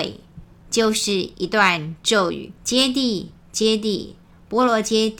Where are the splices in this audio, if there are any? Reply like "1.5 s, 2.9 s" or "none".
2.6 s